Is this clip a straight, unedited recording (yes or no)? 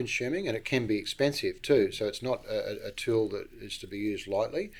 yes